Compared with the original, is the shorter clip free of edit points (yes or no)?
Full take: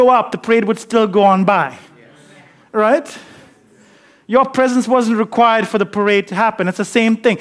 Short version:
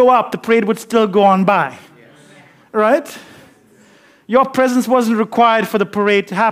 yes